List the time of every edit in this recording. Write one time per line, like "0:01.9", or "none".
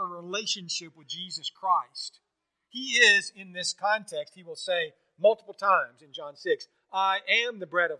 none